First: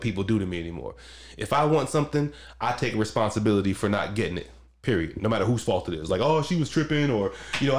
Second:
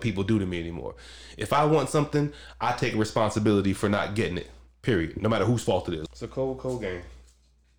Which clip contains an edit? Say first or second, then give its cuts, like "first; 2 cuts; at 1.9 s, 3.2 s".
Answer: second; 1 cut; at 6.1 s